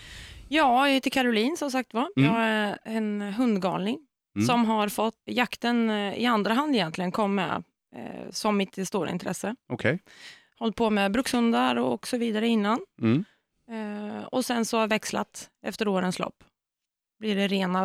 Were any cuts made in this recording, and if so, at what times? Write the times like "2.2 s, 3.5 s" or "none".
5.3 s